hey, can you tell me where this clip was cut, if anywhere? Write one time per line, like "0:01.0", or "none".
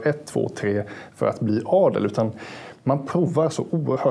none